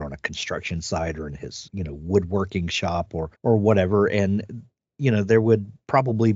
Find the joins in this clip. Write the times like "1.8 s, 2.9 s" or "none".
1.7 s, 3.4 s